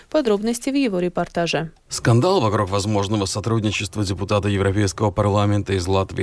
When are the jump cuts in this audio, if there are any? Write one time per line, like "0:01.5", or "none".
0:01.8